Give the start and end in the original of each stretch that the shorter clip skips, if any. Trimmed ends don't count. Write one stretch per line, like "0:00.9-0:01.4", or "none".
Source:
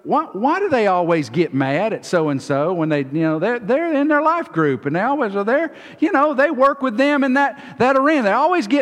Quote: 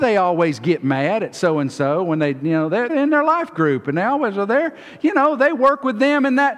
0:03.6-0:03.9